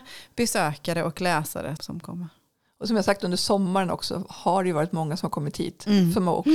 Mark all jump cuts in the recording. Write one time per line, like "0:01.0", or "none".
0:01.8